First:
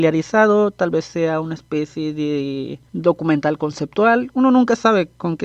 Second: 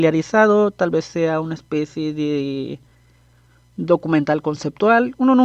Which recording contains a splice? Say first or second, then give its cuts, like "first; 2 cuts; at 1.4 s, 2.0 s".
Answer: first; 1 cut; at 2.9 s